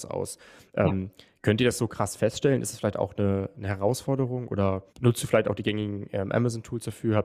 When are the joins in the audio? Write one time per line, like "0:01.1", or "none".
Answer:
0:04.9